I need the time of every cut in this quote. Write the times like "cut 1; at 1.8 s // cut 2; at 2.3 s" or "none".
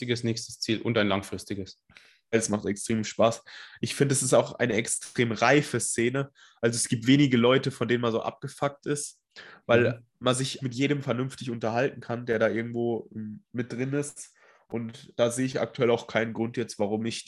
cut 1; at 2.3 s // cut 2; at 10.6 s